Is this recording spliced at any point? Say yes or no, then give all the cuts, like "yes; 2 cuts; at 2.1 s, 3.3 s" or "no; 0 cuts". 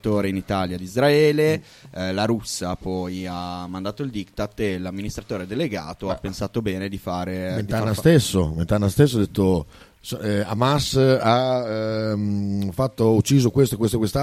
no; 0 cuts